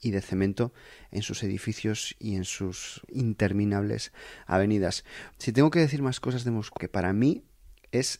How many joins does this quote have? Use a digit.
2